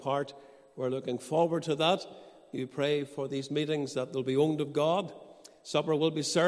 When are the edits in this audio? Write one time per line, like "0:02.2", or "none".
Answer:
none

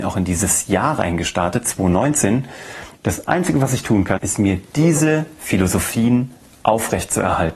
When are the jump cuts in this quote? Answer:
0:03.0
0:04.2

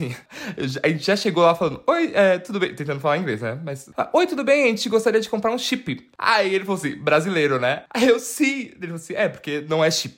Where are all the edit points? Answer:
none

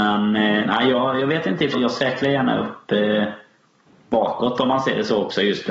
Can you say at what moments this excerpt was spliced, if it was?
0:01.7

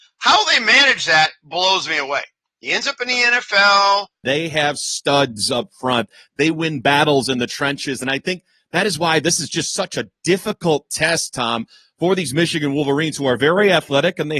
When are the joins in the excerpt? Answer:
0:02.5
0:04.2

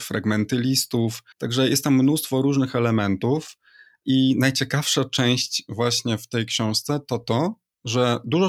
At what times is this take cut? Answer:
0:01.3

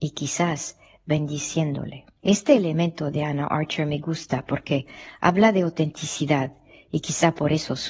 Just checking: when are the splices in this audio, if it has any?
0:02.2

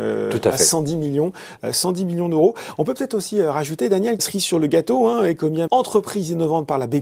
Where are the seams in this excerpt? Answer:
0:04.2
0:05.7

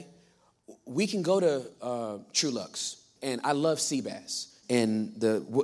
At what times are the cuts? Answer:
0:03.2
0:04.6

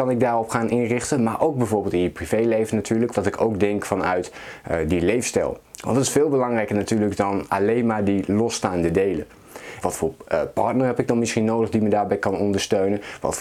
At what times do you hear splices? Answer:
0:03.1
0:09.8

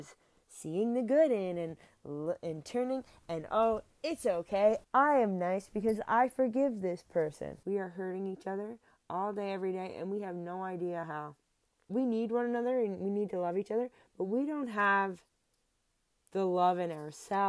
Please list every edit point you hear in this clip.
0:04.8
0:07.6
0:11.9

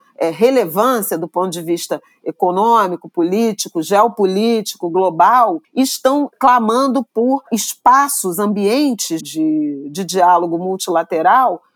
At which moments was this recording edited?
0:09.2

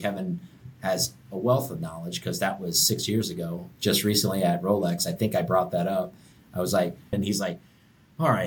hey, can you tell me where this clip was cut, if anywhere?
0:07.1

